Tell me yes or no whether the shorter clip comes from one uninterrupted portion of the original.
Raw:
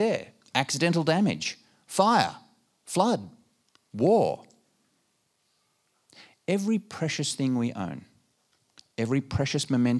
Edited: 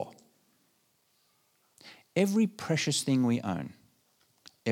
yes